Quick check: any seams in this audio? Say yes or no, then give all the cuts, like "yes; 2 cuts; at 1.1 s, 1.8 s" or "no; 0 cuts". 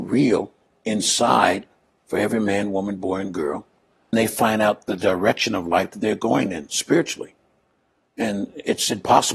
yes; 1 cut; at 4.1 s